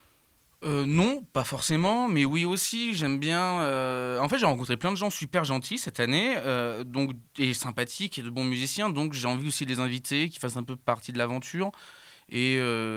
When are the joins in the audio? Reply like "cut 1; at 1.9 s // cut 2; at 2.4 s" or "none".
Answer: none